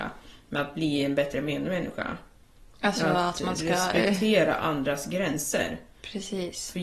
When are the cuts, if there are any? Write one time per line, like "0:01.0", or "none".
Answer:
none